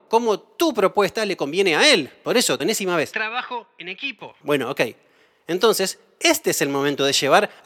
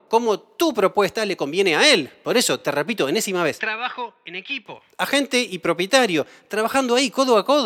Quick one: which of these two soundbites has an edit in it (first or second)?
first